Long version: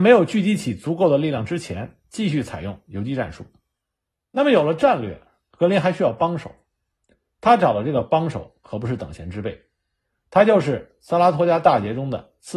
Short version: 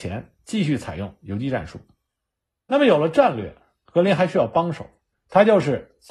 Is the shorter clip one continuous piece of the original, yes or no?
no